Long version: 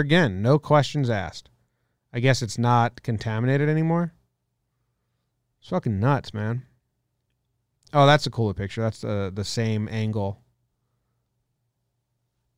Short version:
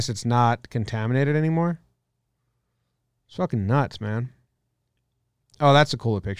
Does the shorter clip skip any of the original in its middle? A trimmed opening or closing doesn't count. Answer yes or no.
no